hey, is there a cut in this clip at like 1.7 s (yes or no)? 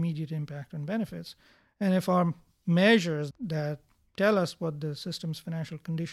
no